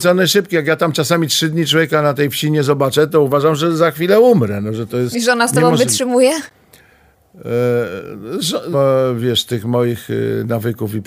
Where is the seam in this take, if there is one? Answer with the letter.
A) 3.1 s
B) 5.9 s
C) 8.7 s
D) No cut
C